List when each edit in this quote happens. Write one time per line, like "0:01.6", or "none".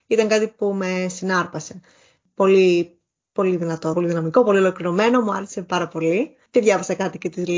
0:03.9